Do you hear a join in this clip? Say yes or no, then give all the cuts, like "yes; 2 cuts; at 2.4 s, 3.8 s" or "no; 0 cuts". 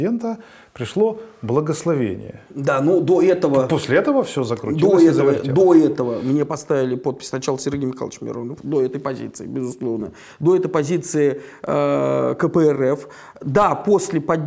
no; 0 cuts